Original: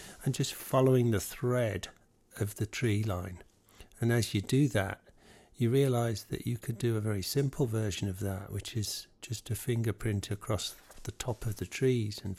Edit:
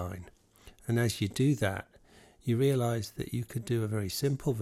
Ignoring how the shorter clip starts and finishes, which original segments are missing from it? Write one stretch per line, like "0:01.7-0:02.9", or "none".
none